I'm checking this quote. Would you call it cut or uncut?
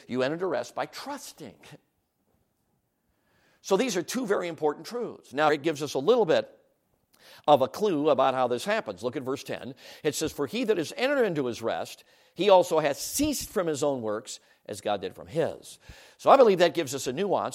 cut